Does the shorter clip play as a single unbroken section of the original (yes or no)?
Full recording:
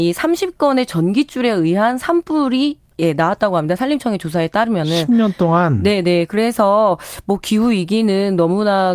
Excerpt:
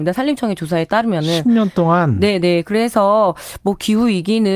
yes